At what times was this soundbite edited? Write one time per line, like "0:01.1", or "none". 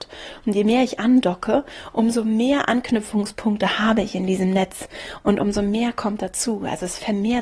none